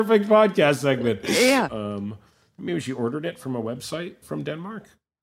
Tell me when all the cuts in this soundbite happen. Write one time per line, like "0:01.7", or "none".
0:01.7
0:04.2